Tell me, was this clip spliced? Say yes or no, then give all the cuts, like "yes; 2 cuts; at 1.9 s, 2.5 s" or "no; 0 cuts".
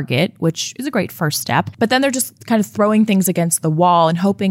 no; 0 cuts